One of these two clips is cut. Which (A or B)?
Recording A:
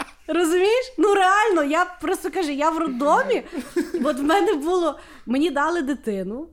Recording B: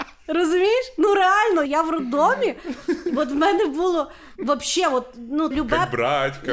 B